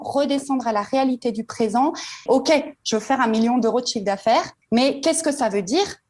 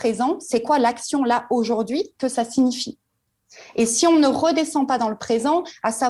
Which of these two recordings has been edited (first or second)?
first